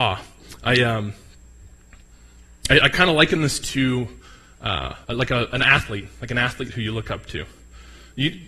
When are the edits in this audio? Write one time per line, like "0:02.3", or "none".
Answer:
0:05.0